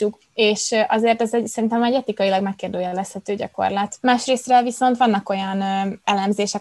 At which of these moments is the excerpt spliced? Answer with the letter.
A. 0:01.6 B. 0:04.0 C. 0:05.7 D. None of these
B